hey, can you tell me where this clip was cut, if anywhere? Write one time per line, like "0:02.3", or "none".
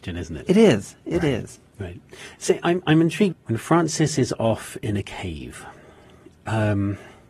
0:03.3